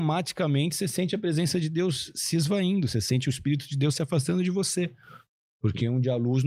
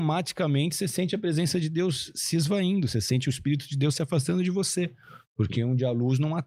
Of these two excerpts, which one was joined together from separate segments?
second; 1 cut; at 5.2 s

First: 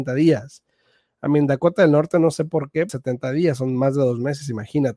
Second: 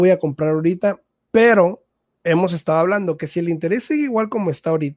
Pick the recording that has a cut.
first; 1 cut; at 2.9 s

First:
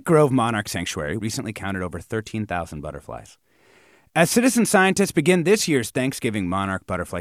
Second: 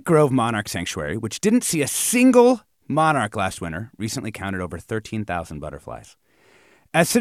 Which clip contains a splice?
first; 1 cut; at 1.2 s

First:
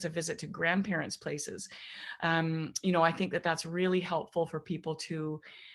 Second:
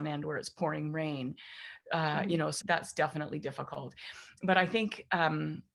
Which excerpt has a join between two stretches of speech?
second; 1 cut; at 2.6 s

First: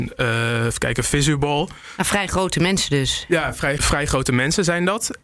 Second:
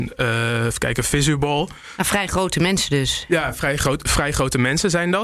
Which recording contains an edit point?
first; 1 cut; at 3.8 s

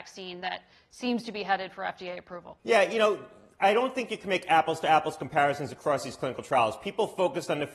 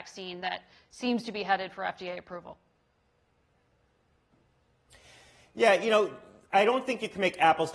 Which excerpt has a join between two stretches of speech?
first; 1 cut; at 2.6 s

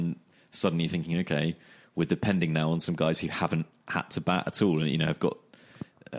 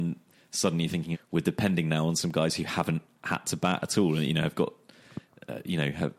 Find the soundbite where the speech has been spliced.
second; 1 cut; at 1.1 s

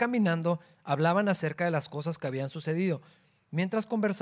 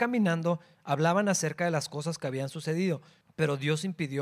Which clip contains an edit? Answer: second; 1 cut; at 3.2 s

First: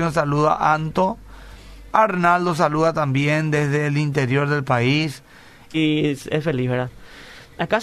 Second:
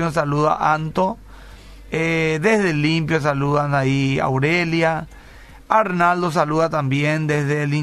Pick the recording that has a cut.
first; 2 cuts; at 1.9 s, 5.7 s

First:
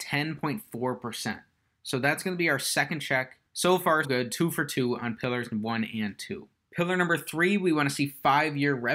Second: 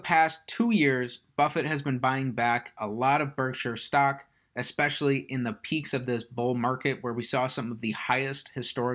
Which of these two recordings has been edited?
first; 1 cut; at 4.0 s

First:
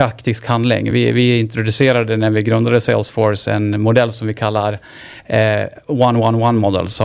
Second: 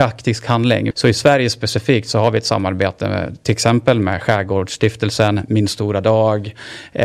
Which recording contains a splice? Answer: second; 1 cut; at 0.9 s

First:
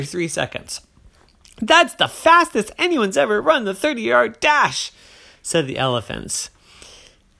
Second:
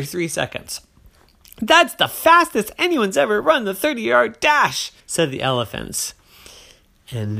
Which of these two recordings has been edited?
second; 1 cut; at 5.0 s

